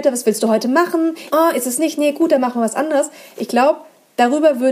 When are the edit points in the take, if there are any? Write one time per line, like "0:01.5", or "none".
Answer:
0:01.3